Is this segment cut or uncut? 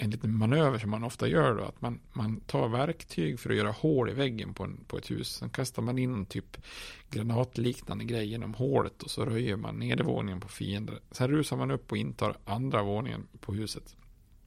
uncut